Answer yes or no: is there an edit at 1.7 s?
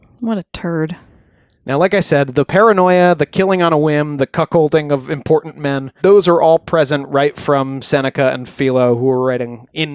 no